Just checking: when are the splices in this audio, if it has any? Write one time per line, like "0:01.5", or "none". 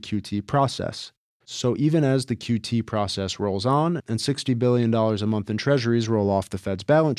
0:01.3